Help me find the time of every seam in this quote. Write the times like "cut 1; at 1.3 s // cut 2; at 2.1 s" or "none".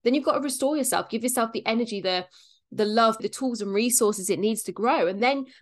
cut 1; at 2.0 s // cut 2; at 3.2 s